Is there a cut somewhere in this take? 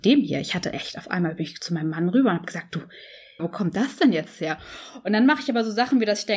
yes; 1 cut; at 3.4 s

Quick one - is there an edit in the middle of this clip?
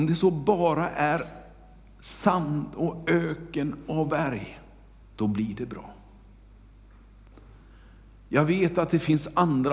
yes; 1 cut; at 5.0 s

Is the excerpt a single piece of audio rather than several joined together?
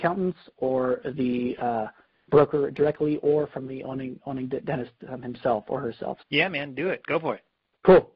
no; 1 cut; at 6.2 s

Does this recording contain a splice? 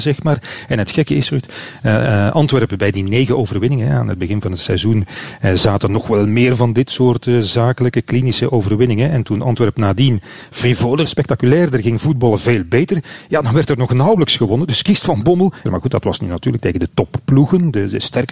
yes; 2 cuts; at 11.1 s, 15.7 s

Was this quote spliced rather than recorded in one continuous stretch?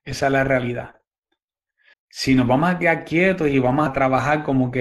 yes; 2 cuts; at 1.9 s, 3.9 s

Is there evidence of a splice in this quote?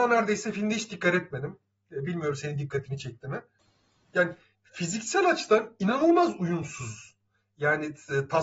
no; 0 cuts

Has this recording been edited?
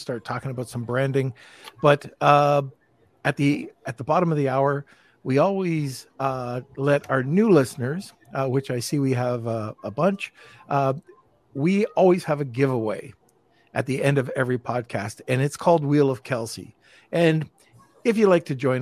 no; 0 cuts

